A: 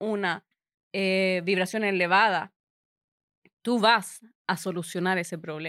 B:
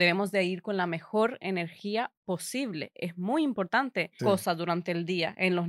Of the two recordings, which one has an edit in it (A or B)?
B